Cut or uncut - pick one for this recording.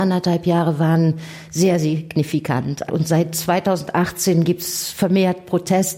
cut